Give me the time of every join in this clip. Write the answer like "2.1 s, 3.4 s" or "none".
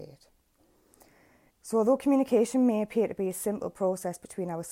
1.5 s